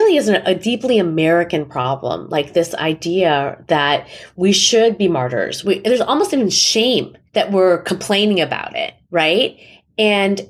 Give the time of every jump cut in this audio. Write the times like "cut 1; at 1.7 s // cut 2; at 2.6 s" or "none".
cut 1; at 5.6 s // cut 2; at 7.3 s // cut 3; at 9.0 s